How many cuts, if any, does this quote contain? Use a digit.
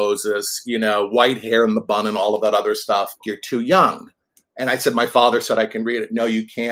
1